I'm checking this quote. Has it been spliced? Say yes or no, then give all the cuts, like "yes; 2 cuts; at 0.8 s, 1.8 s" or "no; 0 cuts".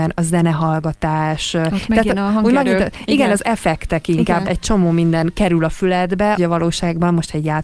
yes; 2 cuts; at 4.4 s, 6.3 s